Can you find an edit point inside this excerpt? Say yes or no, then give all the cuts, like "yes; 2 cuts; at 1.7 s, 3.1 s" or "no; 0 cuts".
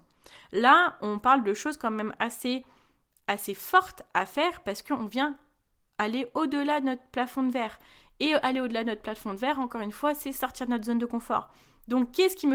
no; 0 cuts